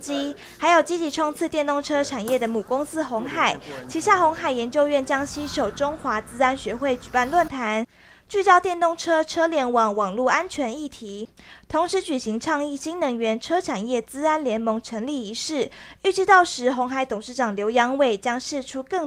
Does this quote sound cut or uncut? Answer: uncut